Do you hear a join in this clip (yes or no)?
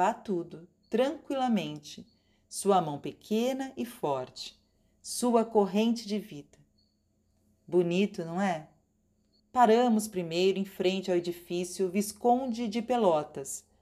yes